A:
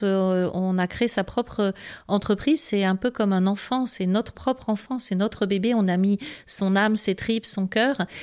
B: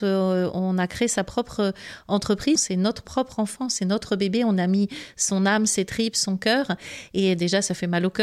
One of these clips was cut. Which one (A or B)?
B